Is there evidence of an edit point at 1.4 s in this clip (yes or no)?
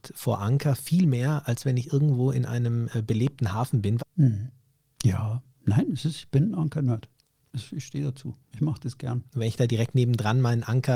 no